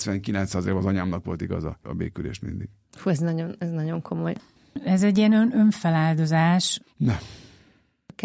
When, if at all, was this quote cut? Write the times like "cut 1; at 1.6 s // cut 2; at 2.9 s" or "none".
cut 1; at 1.8 s // cut 2; at 6.8 s